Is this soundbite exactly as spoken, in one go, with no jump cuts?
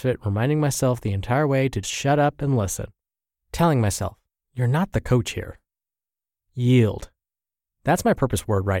no; 1 cut; at 1.8 s

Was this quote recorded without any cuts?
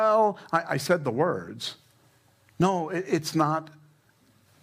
yes; 0 cuts

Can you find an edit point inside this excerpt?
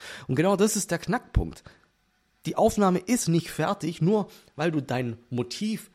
no; 0 cuts

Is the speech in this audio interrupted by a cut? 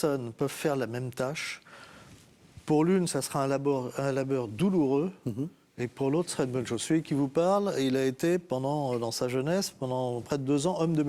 no; 0 cuts

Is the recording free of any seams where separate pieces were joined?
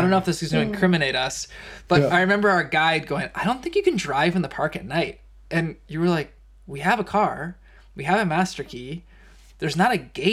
yes; 0 cuts

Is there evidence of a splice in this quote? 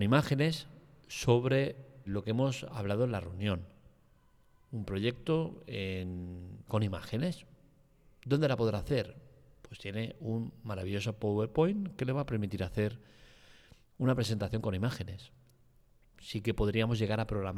yes; 3 cuts; at 2.1 s, 6.7 s, 16.1 s

